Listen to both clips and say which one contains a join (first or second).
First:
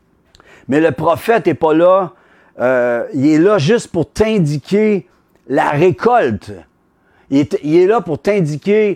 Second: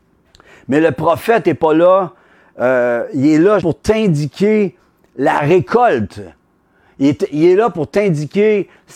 second